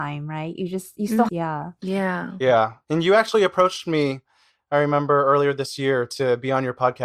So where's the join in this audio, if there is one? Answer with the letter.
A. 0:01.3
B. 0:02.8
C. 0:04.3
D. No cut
A